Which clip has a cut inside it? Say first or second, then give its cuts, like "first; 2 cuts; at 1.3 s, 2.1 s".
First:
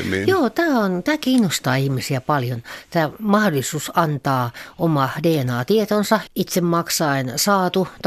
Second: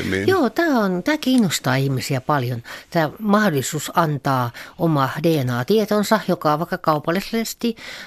first; 1 cut; at 6.3 s